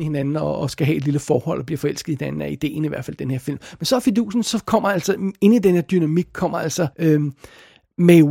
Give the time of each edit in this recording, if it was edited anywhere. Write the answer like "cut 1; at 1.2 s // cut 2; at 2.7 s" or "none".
cut 1; at 6.9 s